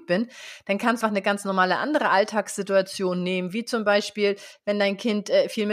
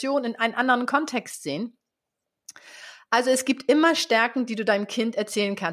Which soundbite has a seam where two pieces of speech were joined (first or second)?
first